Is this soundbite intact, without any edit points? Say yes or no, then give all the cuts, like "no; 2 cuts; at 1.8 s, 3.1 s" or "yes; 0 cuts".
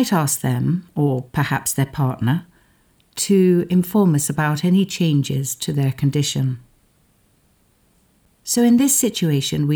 yes; 0 cuts